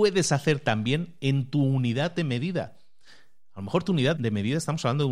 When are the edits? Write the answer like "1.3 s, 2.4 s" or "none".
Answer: 4.2 s